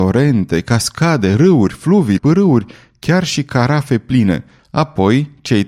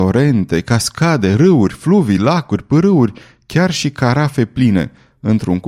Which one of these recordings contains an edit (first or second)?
first